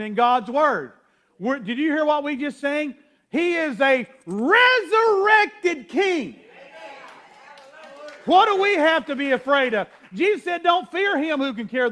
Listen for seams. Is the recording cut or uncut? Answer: uncut